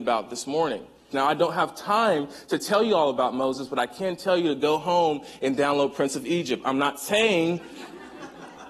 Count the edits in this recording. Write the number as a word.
one